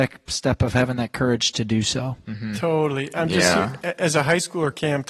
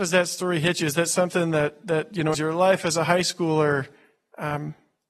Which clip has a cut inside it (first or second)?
second